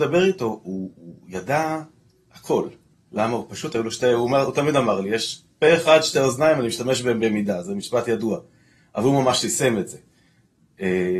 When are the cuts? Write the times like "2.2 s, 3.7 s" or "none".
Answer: none